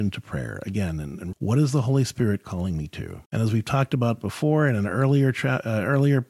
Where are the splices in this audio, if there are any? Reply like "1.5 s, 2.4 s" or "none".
1.3 s, 3.2 s

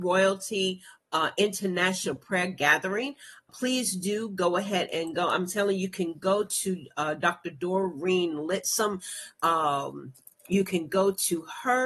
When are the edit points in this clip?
3.5 s

